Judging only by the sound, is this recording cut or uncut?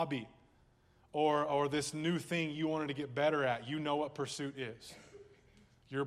uncut